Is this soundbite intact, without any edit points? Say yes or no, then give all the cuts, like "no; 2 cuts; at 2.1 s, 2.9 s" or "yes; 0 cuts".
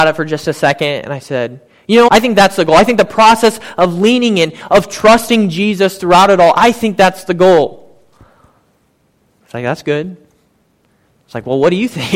no; 1 cut; at 2.1 s